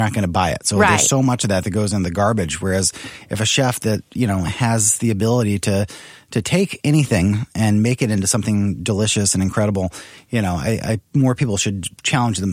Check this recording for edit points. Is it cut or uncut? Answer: uncut